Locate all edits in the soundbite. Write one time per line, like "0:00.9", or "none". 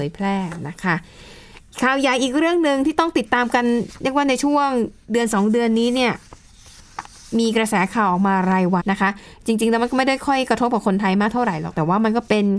0:08.8